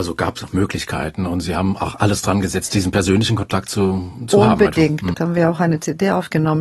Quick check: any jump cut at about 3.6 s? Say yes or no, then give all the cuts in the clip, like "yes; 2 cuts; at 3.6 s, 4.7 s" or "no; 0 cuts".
no; 1 cut; at 5.1 s